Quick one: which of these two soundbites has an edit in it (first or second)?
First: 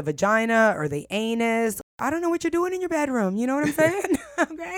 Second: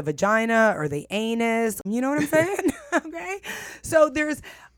second